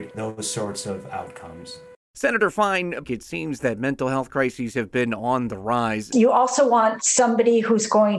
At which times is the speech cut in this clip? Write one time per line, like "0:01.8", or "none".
0:03.0
0:06.1